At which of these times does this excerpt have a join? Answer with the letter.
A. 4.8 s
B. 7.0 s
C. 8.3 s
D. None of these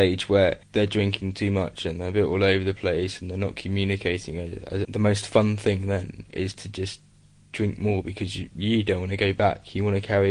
A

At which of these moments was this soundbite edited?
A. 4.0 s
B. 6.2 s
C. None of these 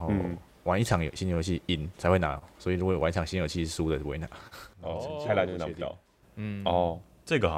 B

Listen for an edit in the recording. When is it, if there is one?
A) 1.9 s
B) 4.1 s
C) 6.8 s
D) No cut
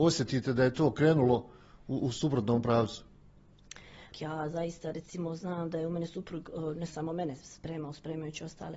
B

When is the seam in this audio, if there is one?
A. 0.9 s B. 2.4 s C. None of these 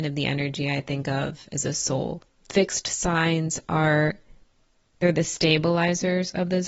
B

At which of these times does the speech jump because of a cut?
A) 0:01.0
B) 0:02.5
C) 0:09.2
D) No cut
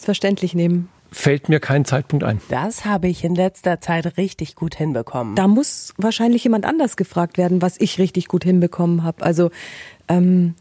A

